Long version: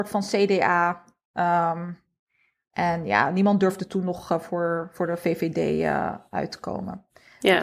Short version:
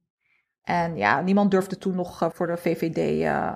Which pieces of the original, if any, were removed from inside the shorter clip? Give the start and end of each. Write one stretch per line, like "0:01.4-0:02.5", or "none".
0:04.4-0:04.9